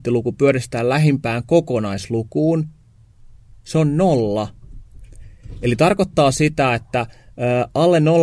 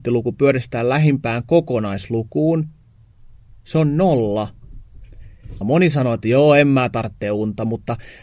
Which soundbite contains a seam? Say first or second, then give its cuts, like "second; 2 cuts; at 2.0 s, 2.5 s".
second; 1 cut; at 5.6 s